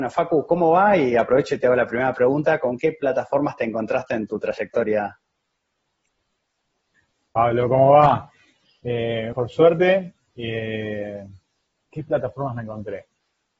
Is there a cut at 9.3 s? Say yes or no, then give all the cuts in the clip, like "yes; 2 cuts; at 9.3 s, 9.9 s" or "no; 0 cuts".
yes; 2 cuts; at 9.3 s, 11.8 s